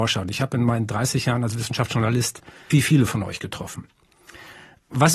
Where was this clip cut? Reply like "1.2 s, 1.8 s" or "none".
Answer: 2.7 s